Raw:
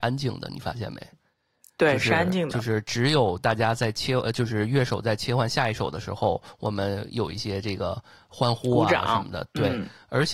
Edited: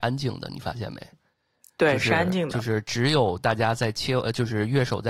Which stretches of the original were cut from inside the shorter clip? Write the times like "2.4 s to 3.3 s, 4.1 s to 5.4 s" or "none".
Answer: none